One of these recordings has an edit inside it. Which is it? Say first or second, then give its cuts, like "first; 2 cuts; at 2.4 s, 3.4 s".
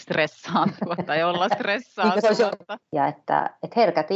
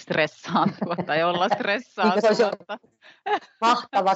first; 1 cut; at 2.8 s